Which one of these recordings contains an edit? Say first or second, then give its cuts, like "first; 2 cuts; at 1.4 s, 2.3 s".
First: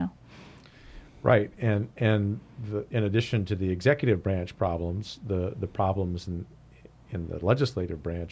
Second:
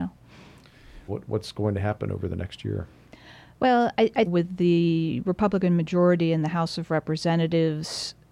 second; 2 cuts; at 1.1 s, 4.3 s